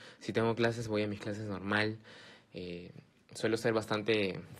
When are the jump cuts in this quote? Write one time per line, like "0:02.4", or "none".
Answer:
none